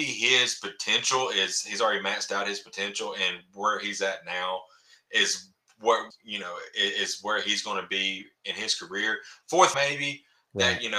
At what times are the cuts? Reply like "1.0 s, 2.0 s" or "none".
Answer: 6.1 s, 9.7 s